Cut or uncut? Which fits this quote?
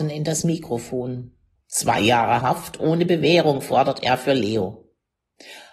cut